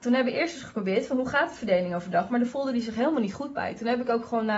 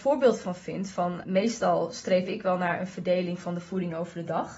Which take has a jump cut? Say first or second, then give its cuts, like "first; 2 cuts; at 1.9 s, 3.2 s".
second; 1 cut; at 1.2 s